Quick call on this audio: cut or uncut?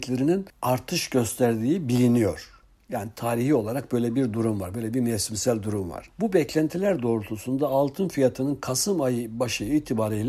uncut